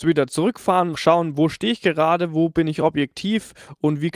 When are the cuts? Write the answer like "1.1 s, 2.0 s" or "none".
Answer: 0.9 s